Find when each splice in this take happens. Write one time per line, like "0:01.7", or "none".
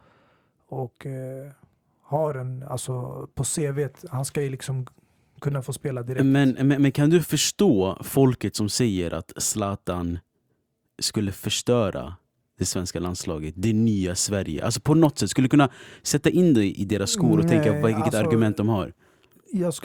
none